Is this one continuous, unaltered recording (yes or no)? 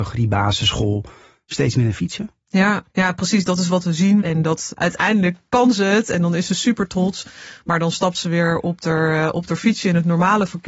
no